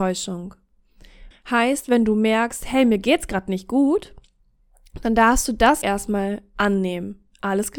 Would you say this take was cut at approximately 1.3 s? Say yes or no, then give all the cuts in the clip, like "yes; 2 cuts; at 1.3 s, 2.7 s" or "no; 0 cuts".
yes; 2 cuts; at 1.3 s, 5.8 s